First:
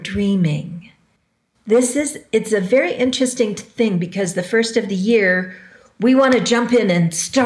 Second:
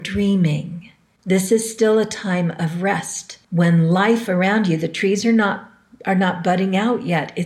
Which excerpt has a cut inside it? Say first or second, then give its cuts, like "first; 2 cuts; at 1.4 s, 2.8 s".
second; 2 cuts; at 1.2 s, 3.4 s